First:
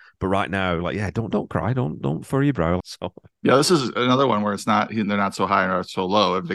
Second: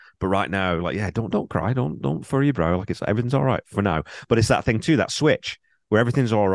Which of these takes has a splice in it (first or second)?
first